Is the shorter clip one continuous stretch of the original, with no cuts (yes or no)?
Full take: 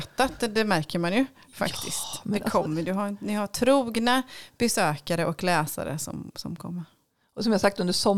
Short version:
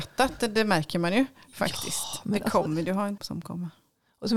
no